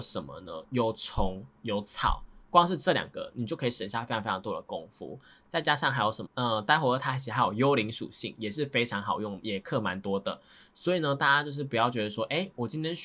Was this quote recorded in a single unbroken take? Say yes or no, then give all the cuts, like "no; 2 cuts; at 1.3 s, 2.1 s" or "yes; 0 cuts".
no; 1 cut; at 6.3 s